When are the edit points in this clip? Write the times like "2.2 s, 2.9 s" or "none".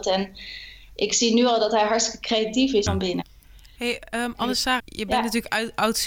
2.9 s, 4.8 s